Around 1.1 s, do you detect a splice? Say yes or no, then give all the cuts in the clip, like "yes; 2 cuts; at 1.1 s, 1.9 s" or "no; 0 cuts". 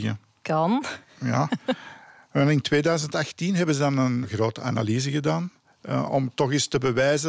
no; 1 cut; at 4.2 s